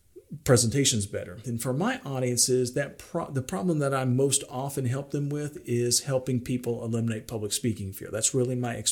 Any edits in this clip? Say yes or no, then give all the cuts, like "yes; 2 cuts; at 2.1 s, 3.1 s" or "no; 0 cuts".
yes; 1 cut; at 1.4 s